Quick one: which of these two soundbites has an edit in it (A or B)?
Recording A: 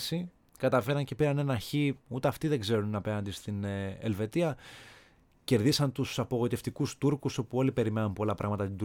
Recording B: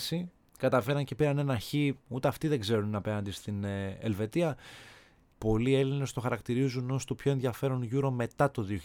B